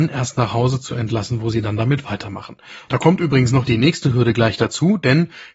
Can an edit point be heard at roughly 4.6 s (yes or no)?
no